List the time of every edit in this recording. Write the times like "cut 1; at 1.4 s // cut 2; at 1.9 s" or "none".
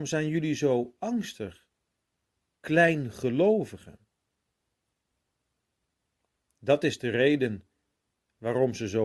cut 1; at 6.4 s